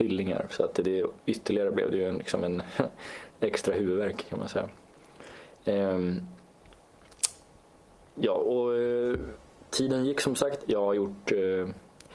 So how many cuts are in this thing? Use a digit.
1